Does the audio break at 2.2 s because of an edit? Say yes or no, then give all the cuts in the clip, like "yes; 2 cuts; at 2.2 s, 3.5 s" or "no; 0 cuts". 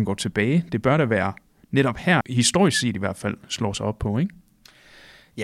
yes; 1 cut; at 2.2 s